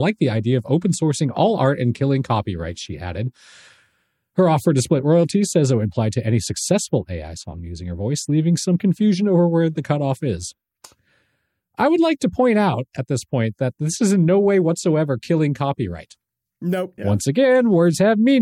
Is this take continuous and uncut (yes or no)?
no